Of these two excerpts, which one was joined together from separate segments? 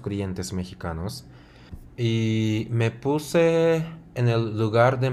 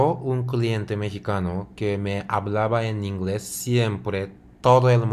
first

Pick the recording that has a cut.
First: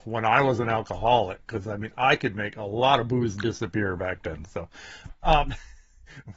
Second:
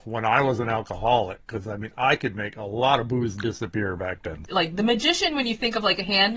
second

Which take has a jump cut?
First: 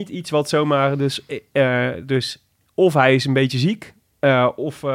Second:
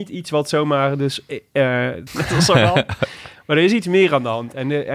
second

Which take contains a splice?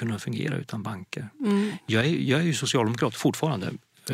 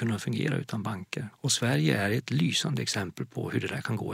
second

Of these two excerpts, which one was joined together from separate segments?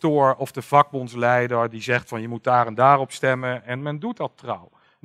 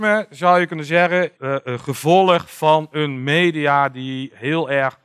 second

